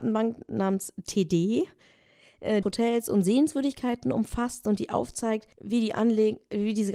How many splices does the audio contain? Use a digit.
2